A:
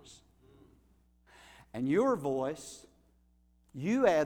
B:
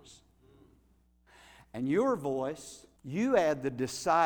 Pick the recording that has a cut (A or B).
B